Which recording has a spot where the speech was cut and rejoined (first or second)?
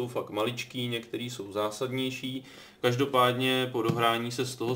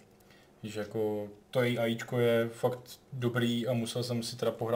second